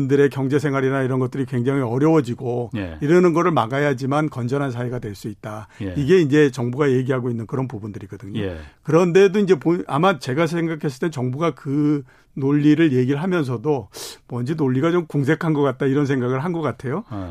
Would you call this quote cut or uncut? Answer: uncut